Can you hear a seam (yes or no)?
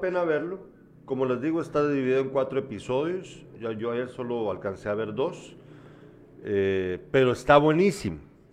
no